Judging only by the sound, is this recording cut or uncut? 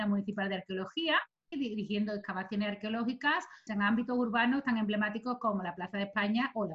cut